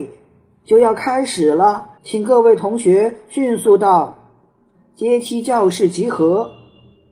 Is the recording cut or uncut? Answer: cut